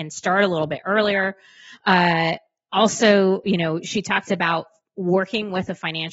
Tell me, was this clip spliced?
no; 0 cuts

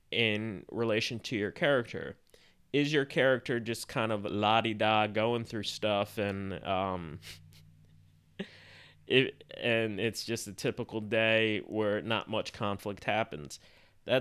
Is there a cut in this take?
no; 0 cuts

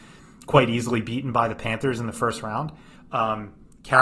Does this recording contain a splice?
yes; 1 cut; at 3.0 s

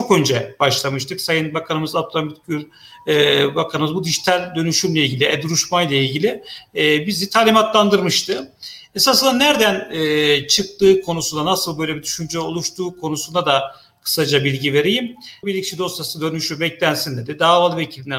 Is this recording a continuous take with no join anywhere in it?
no; 1 cut; at 15.4 s

